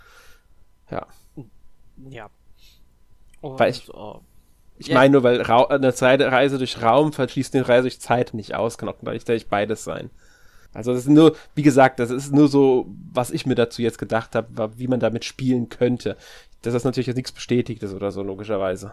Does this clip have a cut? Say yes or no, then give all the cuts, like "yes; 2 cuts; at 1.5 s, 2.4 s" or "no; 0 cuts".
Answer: yes; 2 cuts; at 8.3 s, 10.7 s